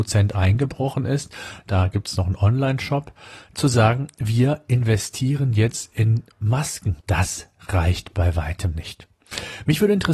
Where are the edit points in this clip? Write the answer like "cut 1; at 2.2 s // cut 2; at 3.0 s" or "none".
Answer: cut 1; at 7.0 s